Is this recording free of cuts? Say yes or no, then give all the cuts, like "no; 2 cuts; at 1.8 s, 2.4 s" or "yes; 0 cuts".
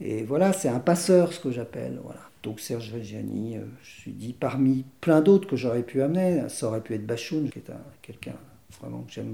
no; 2 cuts; at 2.3 s, 7.5 s